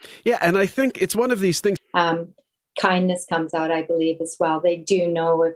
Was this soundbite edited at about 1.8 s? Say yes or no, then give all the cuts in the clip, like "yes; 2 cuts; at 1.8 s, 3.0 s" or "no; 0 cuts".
yes; 1 cut; at 1.8 s